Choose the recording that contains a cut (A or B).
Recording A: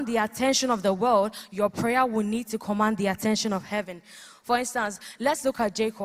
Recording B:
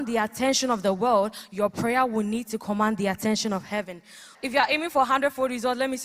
B